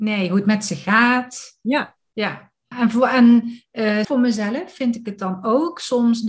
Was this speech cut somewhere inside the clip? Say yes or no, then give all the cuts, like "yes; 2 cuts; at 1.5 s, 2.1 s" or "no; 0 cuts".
yes; 2 cuts; at 2.7 s, 4.0 s